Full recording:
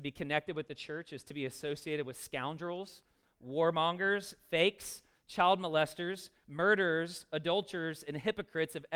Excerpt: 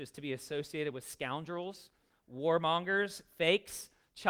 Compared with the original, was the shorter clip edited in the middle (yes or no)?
no